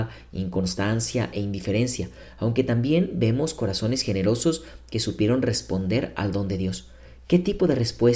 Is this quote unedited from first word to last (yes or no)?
yes